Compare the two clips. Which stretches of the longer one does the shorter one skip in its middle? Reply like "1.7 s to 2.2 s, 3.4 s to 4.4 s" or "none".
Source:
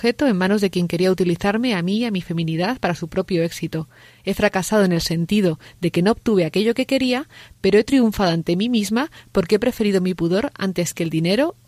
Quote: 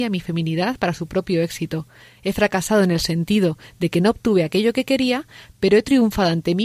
none